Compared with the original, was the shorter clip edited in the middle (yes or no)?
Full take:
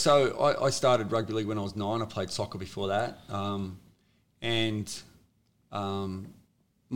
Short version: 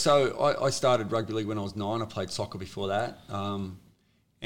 no